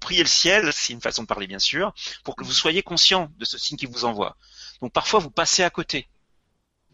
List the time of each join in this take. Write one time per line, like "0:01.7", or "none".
0:02.4